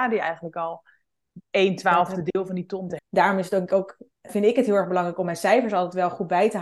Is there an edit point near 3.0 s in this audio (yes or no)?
yes